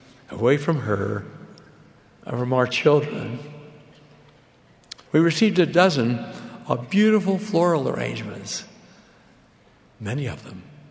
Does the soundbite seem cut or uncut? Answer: cut